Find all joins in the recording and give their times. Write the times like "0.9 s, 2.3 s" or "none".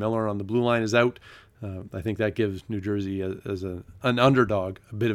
none